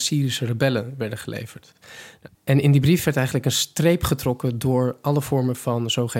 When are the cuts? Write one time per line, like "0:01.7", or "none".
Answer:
0:02.4